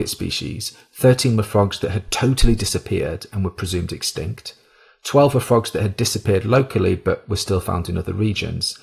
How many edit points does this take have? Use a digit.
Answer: 0